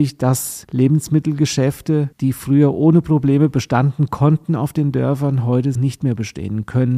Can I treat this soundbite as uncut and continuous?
no; 1 cut; at 5.8 s

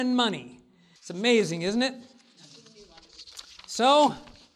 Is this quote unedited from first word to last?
no; 1 cut; at 1.0 s

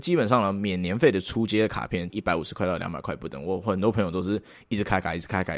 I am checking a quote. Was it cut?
yes; 1 cut; at 2.1 s

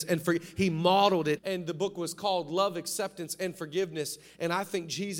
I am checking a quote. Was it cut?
yes; 1 cut; at 1.4 s

